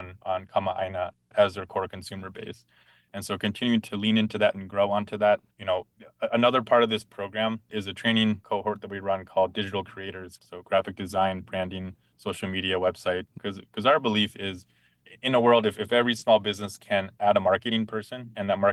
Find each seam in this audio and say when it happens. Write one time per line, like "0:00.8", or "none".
0:05.5
0:10.4
0:13.4